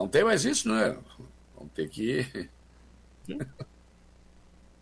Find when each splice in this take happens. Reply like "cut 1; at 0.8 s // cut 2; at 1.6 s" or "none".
cut 1; at 3.2 s